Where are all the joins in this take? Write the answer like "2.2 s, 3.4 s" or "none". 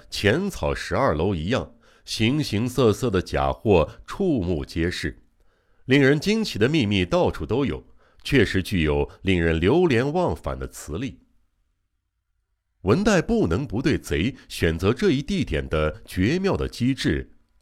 none